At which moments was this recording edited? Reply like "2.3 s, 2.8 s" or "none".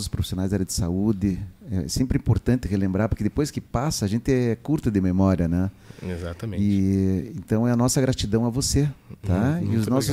none